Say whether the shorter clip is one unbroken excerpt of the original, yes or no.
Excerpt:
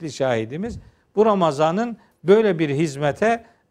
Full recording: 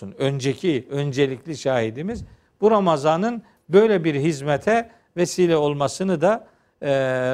yes